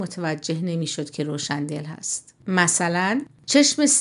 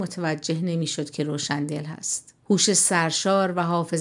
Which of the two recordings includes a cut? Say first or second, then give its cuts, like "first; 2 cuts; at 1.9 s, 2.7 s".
first; 1 cut; at 2.4 s